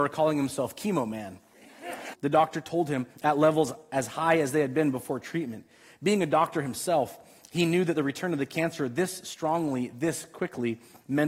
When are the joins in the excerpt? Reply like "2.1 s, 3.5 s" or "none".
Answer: 2.1 s

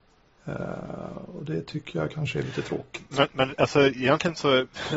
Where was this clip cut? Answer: none

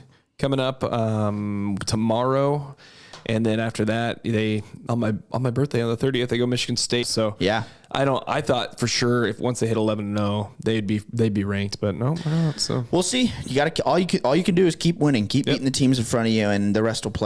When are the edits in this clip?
7.0 s

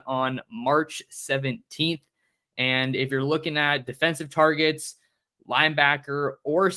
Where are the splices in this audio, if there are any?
none

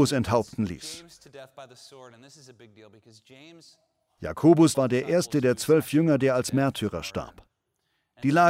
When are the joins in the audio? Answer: 4.7 s

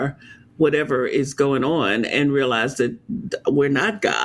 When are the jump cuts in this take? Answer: none

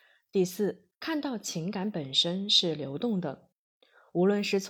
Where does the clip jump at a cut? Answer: 0.9 s

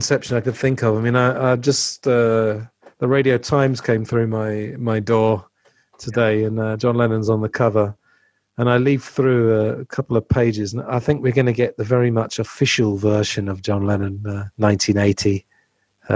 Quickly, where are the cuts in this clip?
14.5 s

